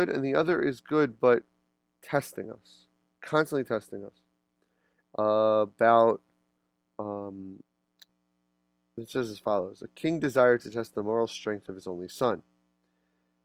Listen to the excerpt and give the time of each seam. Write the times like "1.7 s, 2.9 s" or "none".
5.0 s